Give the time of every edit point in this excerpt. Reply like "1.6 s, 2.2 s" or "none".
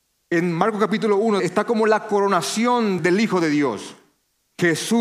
1.4 s, 3.0 s